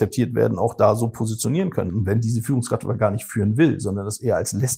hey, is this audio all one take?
no; 1 cut; at 1.9 s

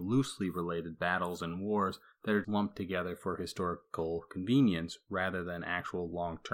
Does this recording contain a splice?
yes; 1 cut; at 2.4 s

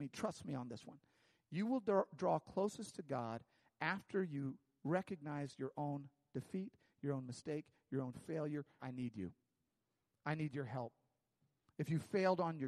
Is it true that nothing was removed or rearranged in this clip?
no; 1 cut; at 8.8 s

